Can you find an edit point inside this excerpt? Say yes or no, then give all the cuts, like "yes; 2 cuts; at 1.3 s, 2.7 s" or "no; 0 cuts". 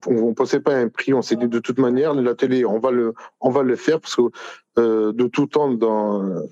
no; 0 cuts